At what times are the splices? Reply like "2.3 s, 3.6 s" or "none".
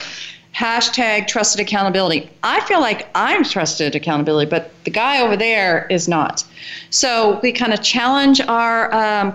none

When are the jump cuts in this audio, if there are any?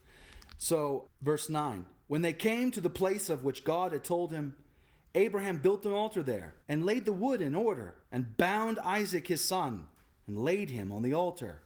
1.1 s, 6.6 s, 8.0 s

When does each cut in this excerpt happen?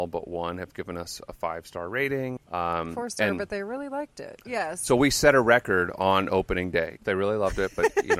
2.4 s, 4.4 s, 7.0 s

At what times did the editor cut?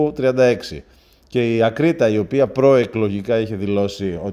none

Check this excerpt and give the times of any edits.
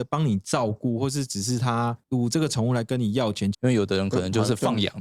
3.5 s

